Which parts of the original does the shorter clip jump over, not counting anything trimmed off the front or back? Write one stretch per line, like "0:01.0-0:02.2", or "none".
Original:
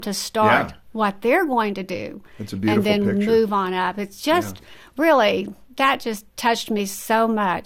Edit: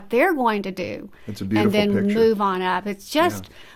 none